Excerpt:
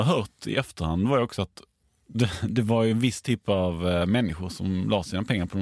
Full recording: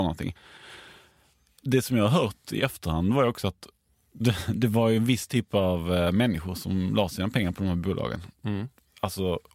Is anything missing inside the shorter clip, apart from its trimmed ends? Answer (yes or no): no